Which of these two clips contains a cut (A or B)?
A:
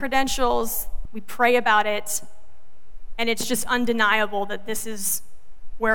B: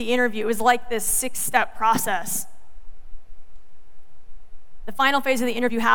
A